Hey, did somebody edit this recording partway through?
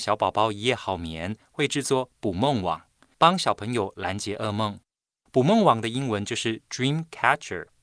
no; 0 cuts

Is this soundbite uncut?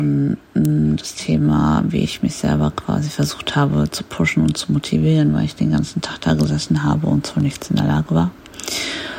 yes; 0 cuts

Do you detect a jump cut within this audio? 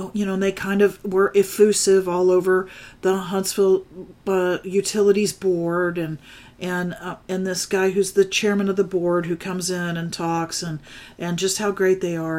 no; 0 cuts

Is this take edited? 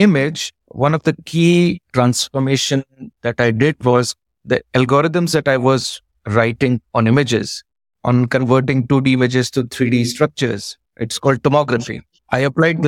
no; 0 cuts

